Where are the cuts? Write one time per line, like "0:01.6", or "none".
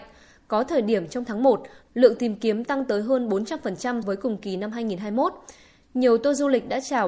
0:04.0